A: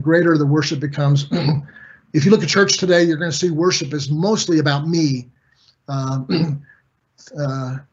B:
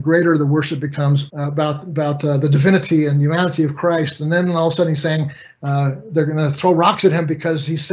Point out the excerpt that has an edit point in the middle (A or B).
B